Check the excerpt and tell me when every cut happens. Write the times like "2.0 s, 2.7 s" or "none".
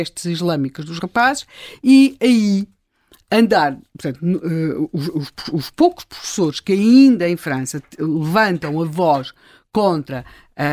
none